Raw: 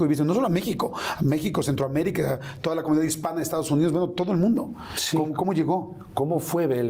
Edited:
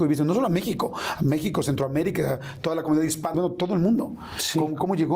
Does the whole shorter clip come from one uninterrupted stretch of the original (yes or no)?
no